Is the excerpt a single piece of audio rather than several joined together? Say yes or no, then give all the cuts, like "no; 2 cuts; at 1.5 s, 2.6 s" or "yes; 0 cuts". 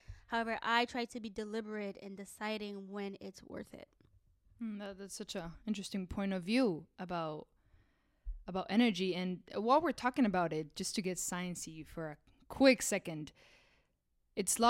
yes; 0 cuts